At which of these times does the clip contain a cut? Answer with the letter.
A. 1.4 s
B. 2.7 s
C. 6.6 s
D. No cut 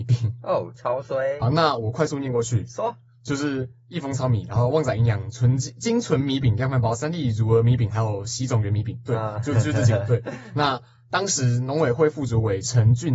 A